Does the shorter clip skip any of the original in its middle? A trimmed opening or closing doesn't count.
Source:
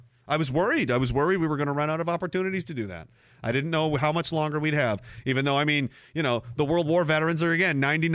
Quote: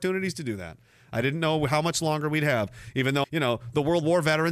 yes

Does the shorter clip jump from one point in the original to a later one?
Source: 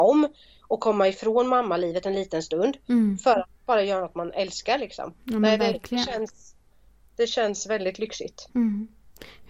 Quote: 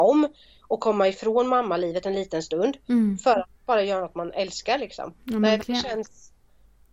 yes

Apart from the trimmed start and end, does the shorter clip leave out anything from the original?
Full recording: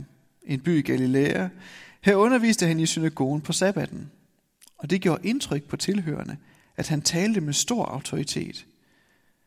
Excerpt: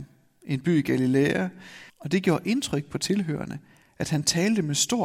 yes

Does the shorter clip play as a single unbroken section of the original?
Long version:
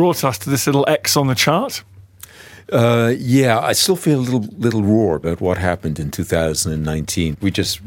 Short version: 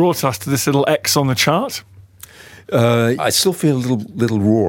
no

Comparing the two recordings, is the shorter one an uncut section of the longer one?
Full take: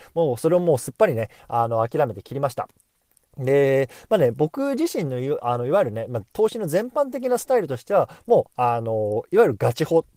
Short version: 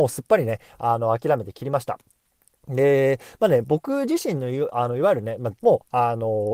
no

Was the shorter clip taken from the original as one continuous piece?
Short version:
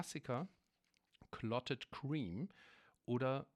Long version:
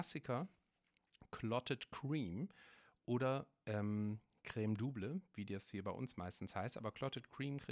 yes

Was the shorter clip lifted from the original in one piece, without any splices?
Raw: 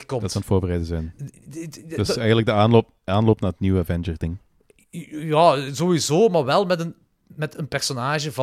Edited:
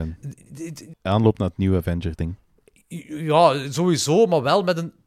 no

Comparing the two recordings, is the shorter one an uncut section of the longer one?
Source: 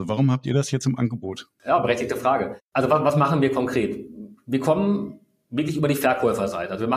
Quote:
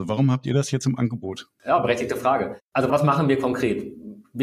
no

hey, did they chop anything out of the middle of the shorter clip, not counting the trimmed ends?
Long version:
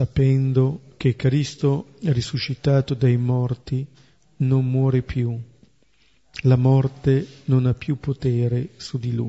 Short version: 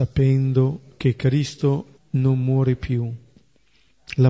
yes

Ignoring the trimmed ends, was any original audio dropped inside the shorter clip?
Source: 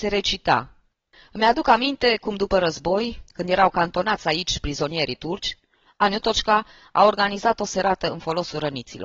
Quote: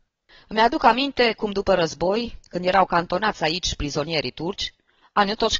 no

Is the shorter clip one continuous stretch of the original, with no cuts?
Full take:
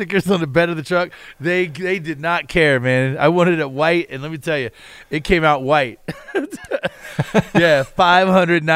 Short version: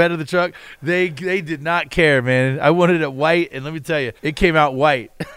no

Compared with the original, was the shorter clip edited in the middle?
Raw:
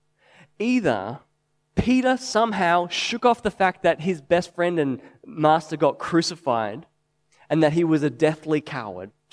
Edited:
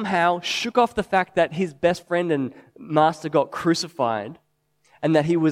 no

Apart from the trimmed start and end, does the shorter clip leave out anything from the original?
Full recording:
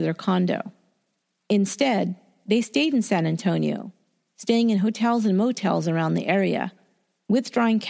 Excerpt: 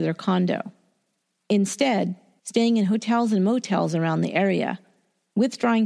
yes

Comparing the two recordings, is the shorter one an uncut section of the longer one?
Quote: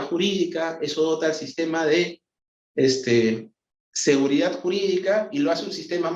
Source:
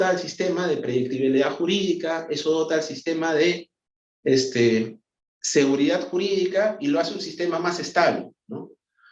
yes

